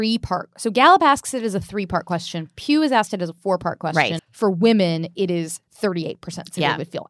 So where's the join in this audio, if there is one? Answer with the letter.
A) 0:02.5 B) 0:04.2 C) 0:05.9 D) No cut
B